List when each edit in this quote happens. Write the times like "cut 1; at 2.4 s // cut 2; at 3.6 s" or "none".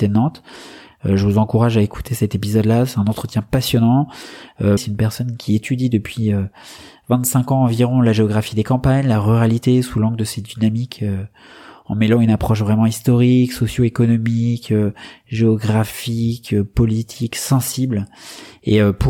cut 1; at 4.8 s